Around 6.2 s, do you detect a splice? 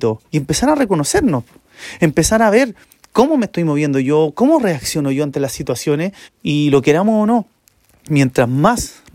yes; 1 cut; at 6.2 s

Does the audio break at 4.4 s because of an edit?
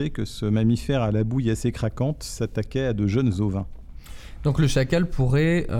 no; 0 cuts

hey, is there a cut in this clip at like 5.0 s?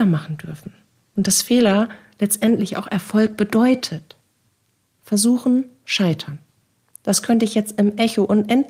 yes; 1 cut; at 5.0 s

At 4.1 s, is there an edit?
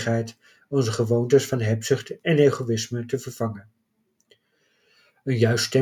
no; 0 cuts

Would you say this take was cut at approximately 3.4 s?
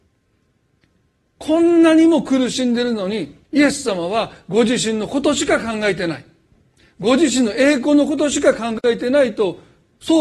yes; 1 cut; at 3.4 s

